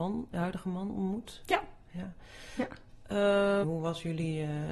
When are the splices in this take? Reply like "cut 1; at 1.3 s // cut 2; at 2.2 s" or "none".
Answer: cut 1; at 3.6 s